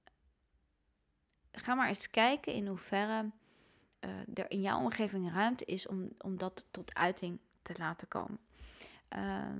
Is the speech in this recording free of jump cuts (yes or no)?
yes